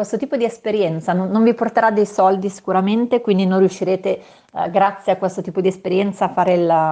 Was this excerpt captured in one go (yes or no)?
yes